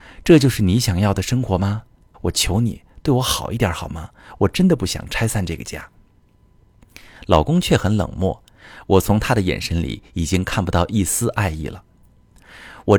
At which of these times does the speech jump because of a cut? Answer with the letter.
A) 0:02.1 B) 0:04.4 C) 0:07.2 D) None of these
A